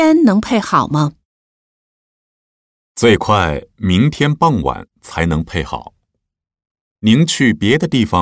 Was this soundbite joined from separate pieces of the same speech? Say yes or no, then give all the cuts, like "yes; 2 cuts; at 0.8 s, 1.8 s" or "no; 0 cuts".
no; 0 cuts